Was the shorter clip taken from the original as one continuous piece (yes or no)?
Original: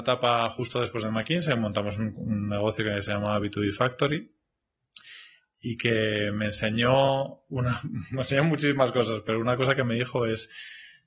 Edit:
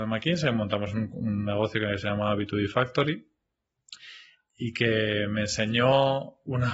yes